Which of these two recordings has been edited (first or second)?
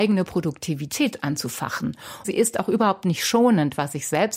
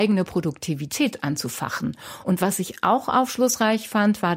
first